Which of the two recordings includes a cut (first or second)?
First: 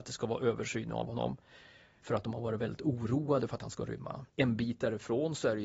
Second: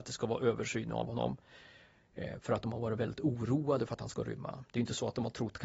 first